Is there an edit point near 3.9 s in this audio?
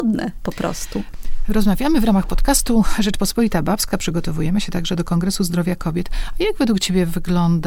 no; 0 cuts

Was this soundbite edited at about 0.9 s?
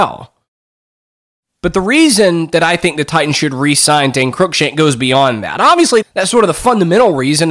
no; 1 cut; at 6.0 s

